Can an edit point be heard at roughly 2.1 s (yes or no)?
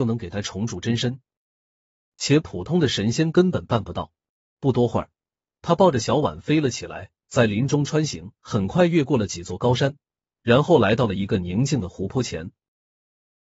yes